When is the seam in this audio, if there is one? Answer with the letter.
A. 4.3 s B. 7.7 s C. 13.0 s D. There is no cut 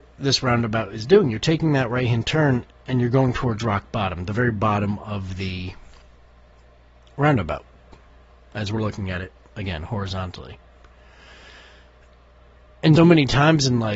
C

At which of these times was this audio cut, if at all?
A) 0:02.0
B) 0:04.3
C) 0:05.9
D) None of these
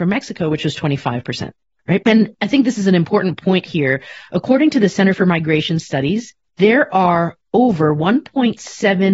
A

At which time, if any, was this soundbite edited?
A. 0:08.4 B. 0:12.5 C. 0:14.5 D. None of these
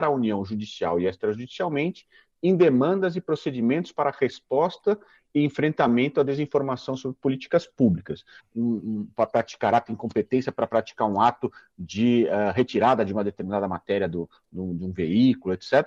A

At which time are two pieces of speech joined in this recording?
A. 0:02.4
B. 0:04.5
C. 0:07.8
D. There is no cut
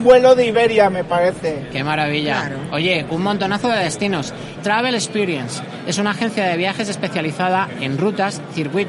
B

